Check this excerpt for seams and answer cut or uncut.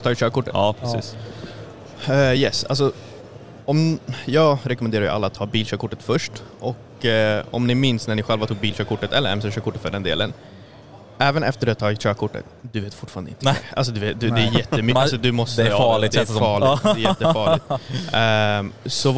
uncut